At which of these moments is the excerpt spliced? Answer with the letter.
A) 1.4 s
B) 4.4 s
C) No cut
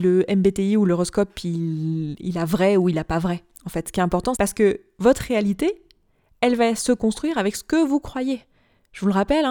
B